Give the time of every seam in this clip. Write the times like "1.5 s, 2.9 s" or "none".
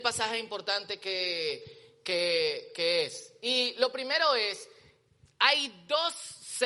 none